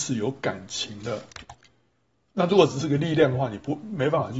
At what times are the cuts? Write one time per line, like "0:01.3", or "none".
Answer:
0:02.2